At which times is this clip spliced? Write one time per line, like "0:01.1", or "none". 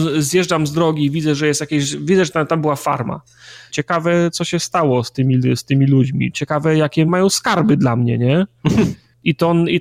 0:03.7
0:07.1